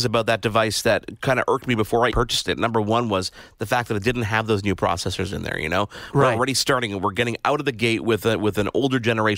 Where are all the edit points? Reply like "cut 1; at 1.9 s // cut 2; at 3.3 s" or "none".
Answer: cut 1; at 2.1 s